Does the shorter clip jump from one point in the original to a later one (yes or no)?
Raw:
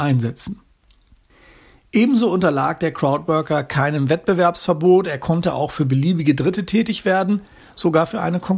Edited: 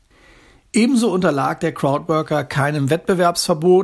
no